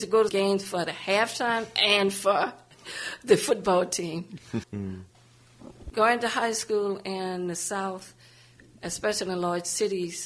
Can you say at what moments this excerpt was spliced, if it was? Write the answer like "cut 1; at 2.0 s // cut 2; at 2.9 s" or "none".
cut 1; at 4.6 s // cut 2; at 5.9 s